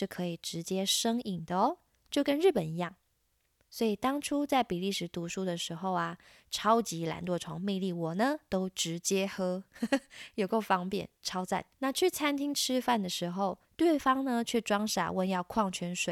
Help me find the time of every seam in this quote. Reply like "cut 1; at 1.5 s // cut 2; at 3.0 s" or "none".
cut 1; at 11.7 s // cut 2; at 13.6 s